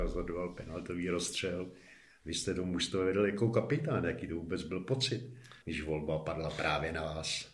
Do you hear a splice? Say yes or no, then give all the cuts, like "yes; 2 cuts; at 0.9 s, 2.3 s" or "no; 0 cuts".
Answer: yes; 1 cut; at 5.6 s